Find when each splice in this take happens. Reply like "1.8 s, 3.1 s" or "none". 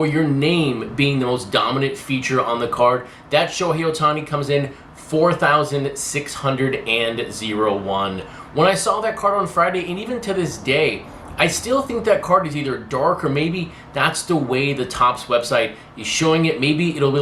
none